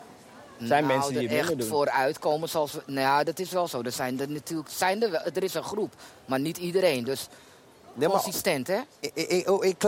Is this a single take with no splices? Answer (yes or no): yes